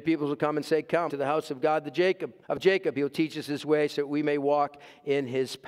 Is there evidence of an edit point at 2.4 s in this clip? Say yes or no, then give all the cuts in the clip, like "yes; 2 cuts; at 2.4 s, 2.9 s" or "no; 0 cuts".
yes; 2 cuts; at 1.1 s, 2.4 s